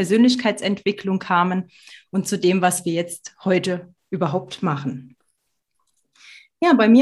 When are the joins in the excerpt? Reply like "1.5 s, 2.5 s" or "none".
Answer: none